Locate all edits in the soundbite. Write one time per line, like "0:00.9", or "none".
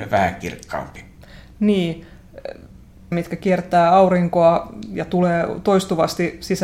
0:03.1